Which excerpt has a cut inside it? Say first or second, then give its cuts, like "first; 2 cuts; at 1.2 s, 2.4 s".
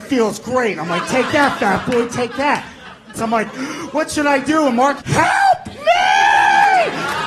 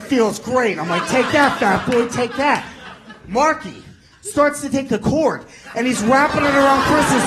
first; 2 cuts; at 3.1 s, 5.0 s